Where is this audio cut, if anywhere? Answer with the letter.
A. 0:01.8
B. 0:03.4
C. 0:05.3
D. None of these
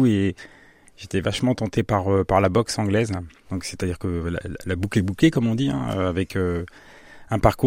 B